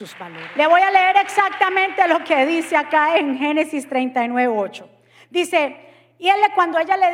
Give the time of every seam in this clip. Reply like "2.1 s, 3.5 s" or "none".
none